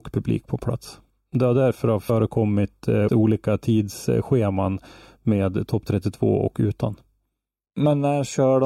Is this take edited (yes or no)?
yes